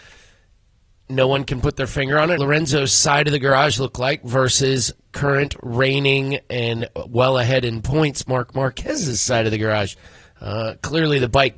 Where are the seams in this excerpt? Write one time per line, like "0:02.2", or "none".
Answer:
0:02.4